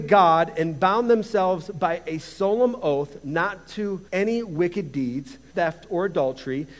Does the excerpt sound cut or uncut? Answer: cut